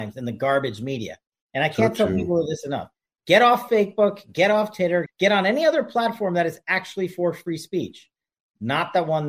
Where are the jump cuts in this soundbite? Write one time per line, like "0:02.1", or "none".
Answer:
0:05.1